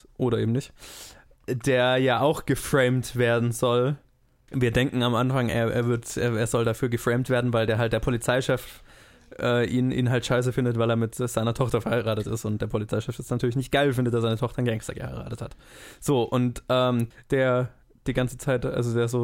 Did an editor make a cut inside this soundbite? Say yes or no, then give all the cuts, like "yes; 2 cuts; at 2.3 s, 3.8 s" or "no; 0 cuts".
yes; 2 cuts; at 4.5 s, 17.1 s